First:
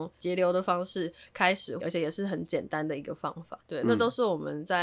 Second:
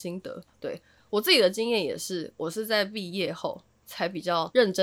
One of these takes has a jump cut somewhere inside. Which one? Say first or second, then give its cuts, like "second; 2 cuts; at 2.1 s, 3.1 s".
first; 2 cuts; at 1.8 s, 3.6 s